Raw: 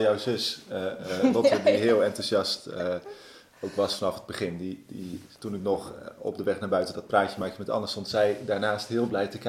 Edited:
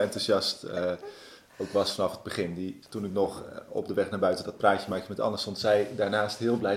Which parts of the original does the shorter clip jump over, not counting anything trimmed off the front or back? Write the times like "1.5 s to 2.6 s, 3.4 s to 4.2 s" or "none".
4.9 s to 5.3 s